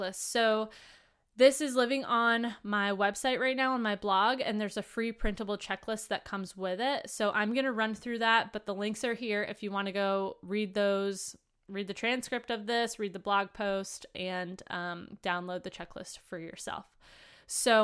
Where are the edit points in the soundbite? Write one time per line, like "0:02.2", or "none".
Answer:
none